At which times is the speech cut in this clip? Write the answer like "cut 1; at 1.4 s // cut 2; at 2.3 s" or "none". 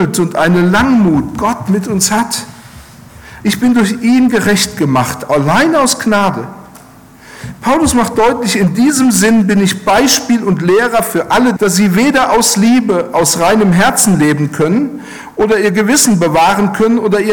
cut 1; at 3.4 s // cut 2; at 11.6 s